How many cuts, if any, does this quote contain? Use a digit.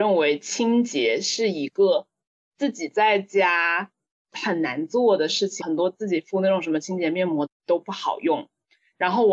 2